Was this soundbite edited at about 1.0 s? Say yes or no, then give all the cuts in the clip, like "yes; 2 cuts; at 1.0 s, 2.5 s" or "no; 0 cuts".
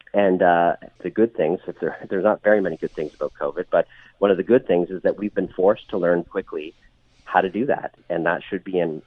yes; 3 cuts; at 1.0 s, 6.2 s, 8.0 s